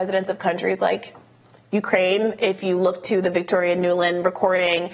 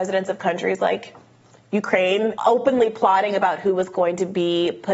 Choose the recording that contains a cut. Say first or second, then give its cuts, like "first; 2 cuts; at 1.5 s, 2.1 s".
second; 1 cut; at 2.4 s